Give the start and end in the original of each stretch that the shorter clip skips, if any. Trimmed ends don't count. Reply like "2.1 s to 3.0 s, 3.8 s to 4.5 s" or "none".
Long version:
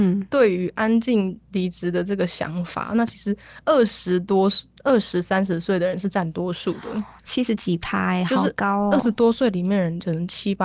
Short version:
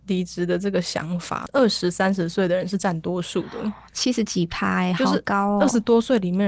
2.9 s to 4.8 s